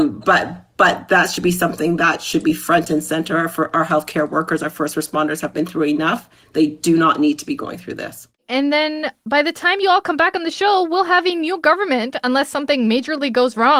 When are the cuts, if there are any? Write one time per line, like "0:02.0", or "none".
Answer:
none